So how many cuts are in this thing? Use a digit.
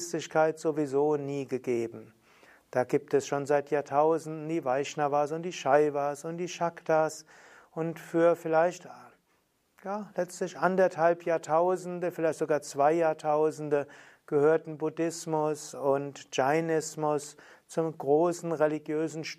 0